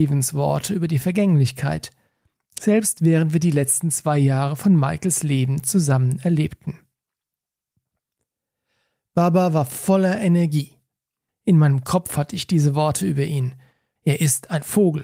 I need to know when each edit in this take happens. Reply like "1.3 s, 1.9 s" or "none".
11.3 s, 14.0 s